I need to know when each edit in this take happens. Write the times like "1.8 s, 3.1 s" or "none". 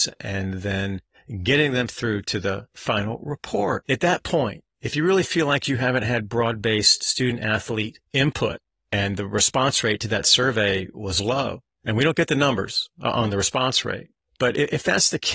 3.8 s